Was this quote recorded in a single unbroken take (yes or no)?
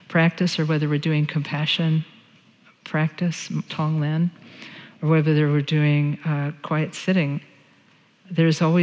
no